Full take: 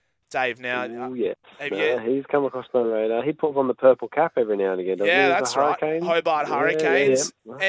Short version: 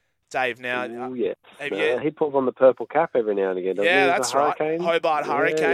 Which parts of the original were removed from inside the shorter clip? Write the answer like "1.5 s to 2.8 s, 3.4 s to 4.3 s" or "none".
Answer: 2.0 s to 3.2 s